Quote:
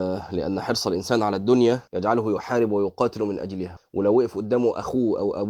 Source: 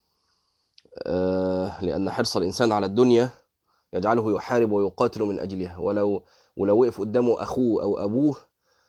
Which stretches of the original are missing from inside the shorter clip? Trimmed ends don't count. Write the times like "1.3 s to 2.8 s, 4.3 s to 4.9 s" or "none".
3.4 s to 3.9 s, 5.8 s to 6.4 s